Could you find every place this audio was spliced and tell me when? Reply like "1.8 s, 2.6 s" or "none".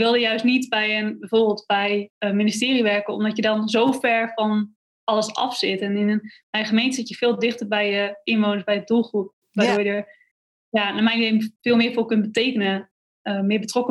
none